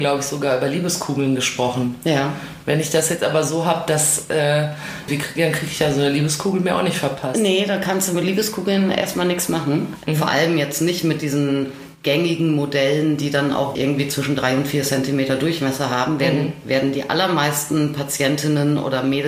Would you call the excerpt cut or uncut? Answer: cut